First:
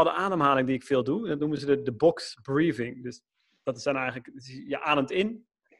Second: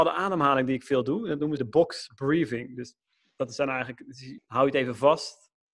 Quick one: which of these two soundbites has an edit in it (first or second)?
second